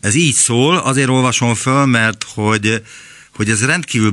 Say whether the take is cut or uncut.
uncut